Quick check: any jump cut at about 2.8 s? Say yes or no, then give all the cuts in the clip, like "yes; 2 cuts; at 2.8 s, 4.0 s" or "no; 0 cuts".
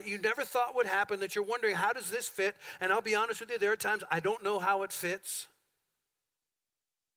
no; 0 cuts